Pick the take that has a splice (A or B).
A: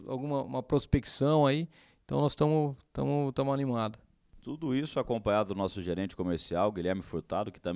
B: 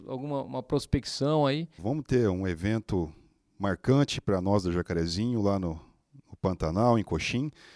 B